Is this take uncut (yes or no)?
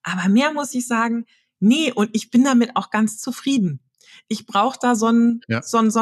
yes